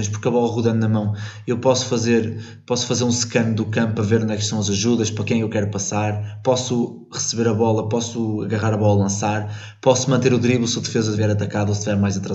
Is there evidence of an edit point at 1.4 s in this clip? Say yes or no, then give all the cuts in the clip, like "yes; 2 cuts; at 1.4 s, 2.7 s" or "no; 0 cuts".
no; 1 cut; at 11.1 s